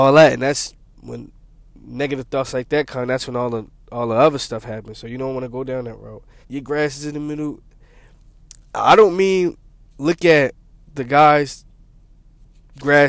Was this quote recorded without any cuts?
no; 1 cut; at 6.4 s

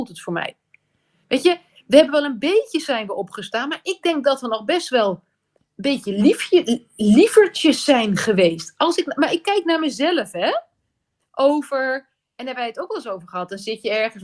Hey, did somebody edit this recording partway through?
no; 0 cuts

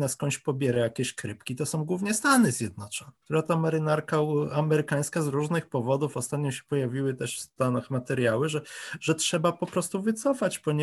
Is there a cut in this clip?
no; 0 cuts

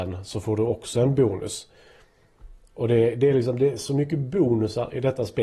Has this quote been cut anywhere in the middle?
no; 0 cuts

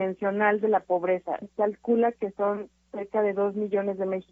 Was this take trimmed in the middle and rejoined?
yes; 1 cut; at 1.4 s

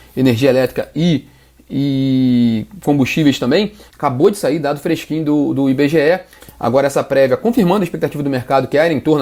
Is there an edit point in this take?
yes; 2 cuts; at 3.9 s, 6.4 s

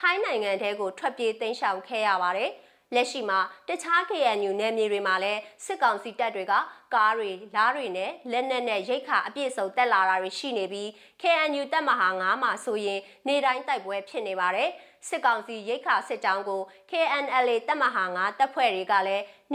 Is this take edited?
no; 0 cuts

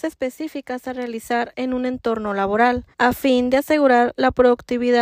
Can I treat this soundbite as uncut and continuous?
no; 1 cut; at 2.9 s

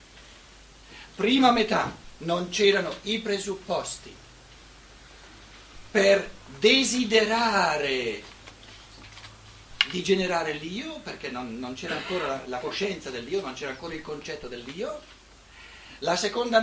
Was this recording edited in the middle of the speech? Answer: no; 0 cuts

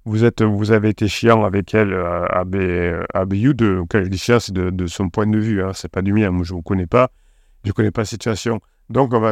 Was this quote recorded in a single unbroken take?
yes; 0 cuts

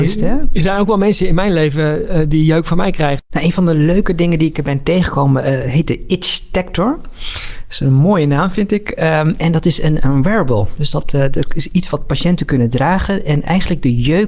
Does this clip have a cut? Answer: yes; 1 cut; at 3.2 s

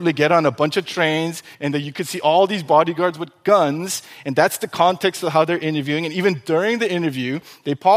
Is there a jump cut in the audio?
yes; 1 cut; at 1.5 s

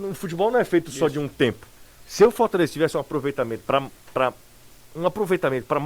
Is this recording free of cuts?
no; 2 cuts; at 2.0 s, 3.6 s

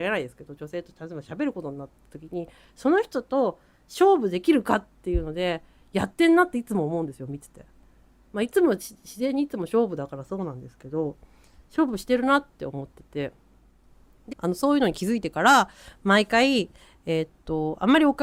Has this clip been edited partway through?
yes; 1 cut; at 14.3 s

